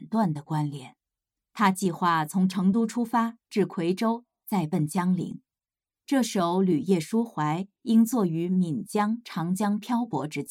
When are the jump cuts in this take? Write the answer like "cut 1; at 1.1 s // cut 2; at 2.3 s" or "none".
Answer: none